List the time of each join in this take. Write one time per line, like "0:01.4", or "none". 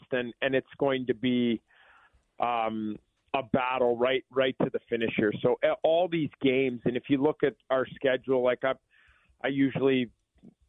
0:03.3